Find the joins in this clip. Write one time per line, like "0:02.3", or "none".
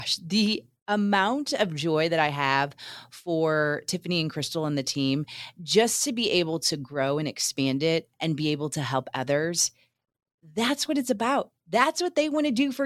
none